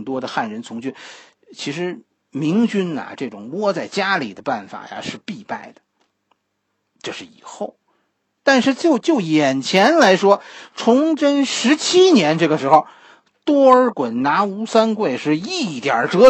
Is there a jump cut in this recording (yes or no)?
no